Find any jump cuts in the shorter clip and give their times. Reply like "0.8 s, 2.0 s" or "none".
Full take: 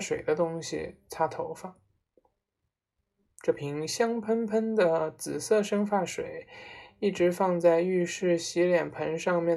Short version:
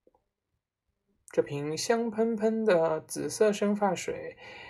none